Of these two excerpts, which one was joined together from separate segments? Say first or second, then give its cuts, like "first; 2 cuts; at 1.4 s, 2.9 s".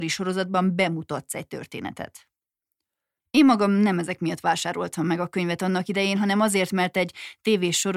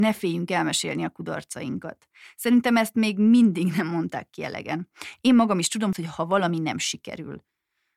second; 1 cut; at 5.9 s